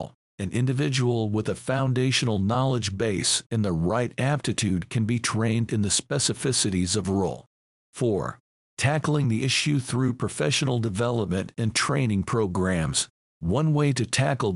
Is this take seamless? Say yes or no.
yes